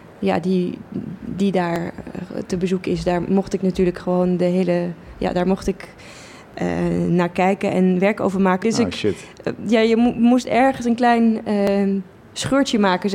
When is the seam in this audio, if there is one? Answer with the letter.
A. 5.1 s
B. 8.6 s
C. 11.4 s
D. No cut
B